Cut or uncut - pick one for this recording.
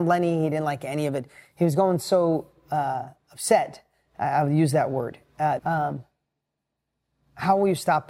cut